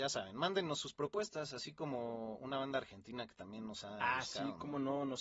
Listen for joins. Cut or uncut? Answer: uncut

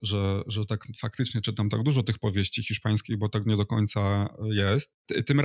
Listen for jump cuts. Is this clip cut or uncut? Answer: uncut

